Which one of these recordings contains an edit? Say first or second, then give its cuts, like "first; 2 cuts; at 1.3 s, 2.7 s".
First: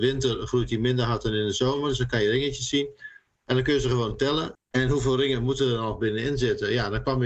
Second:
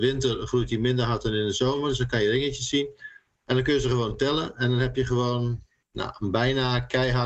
first; 1 cut; at 4.5 s